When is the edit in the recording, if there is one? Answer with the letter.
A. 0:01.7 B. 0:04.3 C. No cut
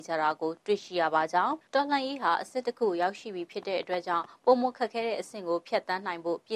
A